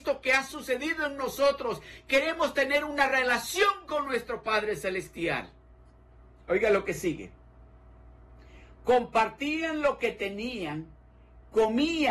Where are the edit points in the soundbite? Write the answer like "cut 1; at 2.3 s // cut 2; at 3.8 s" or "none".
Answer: none